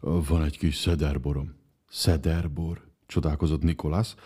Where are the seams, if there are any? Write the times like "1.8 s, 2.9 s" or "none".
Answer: 1.8 s, 2.9 s